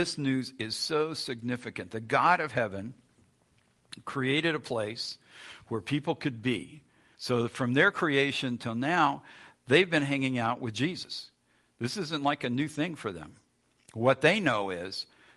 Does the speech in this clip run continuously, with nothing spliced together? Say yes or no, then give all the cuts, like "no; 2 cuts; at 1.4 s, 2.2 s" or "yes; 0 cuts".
no; 1 cut; at 7.1 s